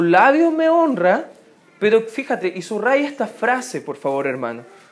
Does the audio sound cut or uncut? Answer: uncut